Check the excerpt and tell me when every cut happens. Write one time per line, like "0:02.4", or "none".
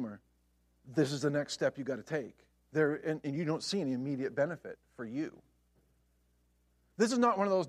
none